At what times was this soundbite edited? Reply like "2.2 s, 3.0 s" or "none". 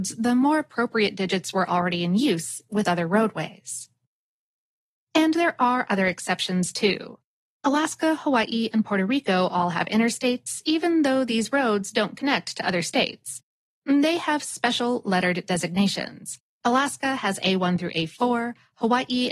none